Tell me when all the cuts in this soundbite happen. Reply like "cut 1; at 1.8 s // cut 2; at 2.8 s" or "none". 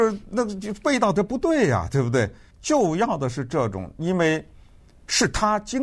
none